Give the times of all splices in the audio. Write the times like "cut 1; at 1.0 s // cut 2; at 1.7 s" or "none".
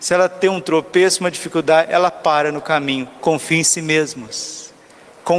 cut 1; at 3.2 s